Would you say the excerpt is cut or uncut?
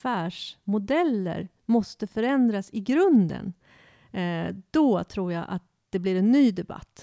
uncut